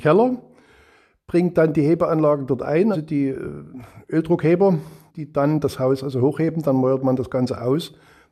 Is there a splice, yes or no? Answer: yes